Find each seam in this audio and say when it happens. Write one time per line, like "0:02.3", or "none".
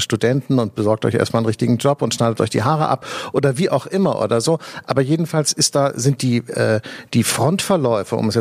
none